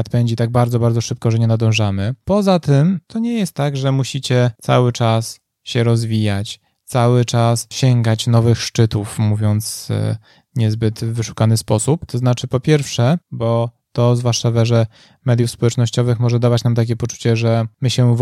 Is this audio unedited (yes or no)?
no